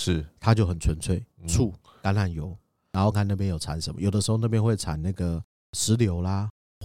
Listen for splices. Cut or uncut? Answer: cut